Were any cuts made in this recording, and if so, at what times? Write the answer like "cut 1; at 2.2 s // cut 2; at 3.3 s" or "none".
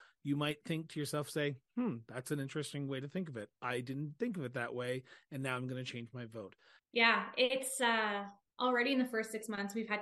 cut 1; at 6.8 s

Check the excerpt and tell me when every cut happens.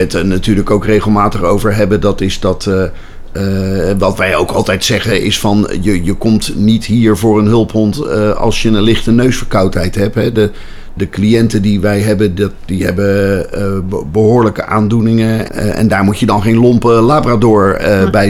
cut 1; at 11.0 s // cut 2; at 15.5 s

